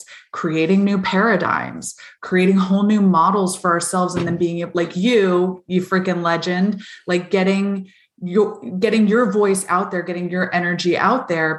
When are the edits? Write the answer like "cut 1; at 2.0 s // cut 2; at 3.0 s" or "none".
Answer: none